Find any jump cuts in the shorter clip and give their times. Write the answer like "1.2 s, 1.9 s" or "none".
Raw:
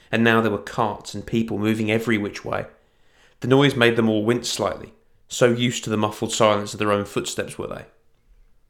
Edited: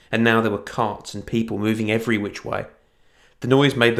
none